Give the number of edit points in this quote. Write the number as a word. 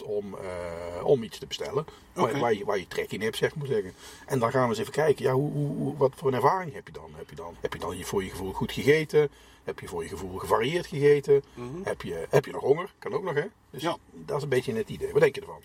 one